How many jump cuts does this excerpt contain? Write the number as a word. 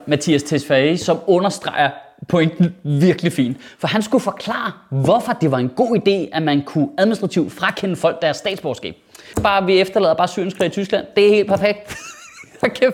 one